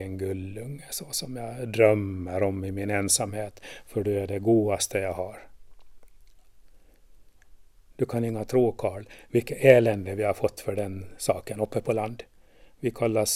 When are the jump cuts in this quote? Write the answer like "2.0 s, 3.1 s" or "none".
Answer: none